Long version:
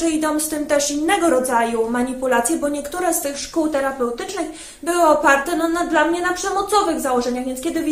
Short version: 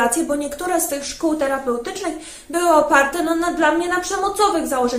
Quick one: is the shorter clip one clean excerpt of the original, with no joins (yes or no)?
yes